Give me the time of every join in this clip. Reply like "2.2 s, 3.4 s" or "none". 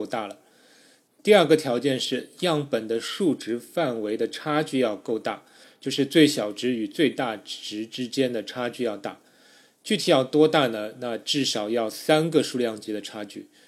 none